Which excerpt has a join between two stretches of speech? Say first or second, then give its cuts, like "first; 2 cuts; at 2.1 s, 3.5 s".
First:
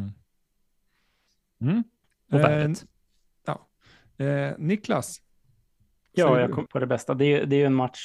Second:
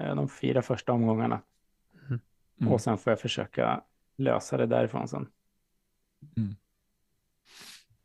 first; 1 cut; at 6.7 s